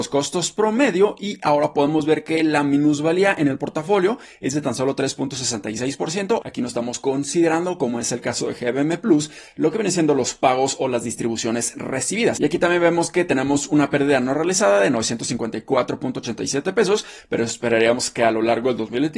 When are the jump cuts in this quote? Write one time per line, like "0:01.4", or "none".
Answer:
0:06.4